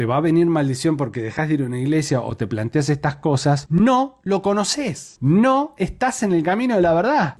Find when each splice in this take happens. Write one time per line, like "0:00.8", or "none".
none